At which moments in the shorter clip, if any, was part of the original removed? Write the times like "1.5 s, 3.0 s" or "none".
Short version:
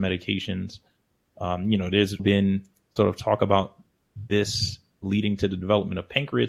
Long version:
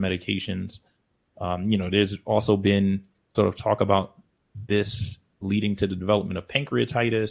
2.2 s